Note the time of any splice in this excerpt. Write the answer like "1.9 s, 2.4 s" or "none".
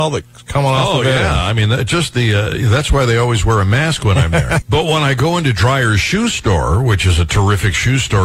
4.6 s